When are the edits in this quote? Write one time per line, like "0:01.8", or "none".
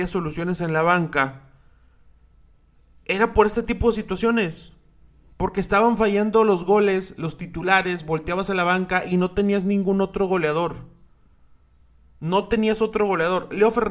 none

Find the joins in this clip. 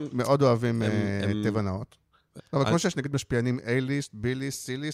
0:02.4

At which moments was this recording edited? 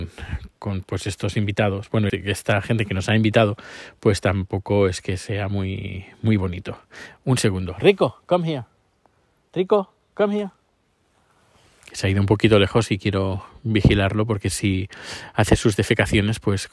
0:02.1

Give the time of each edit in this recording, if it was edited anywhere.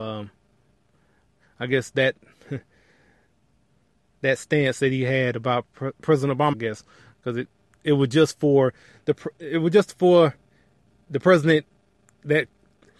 0:06.5

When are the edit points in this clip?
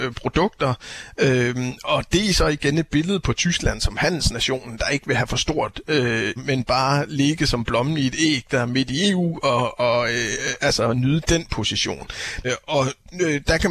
0:06.4
0:12.4

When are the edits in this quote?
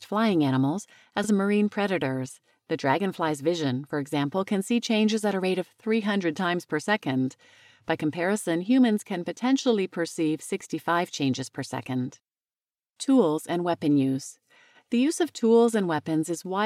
0:01.2

